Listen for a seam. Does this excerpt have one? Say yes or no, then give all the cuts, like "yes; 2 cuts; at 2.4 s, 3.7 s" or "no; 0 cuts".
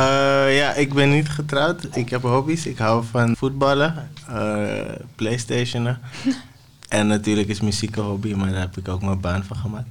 yes; 1 cut; at 3.3 s